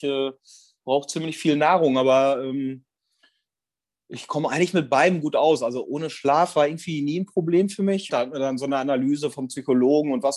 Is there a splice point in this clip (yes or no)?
yes